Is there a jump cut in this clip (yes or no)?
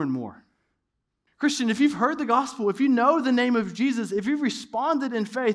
yes